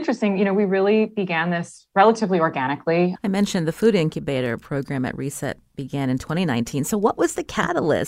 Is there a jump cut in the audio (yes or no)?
yes